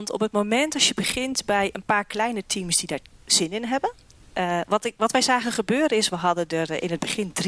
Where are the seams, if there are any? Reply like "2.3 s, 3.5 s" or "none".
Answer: none